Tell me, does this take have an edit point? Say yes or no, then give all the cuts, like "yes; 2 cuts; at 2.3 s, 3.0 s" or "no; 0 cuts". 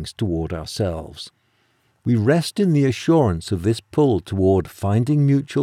yes; 1 cut; at 2.0 s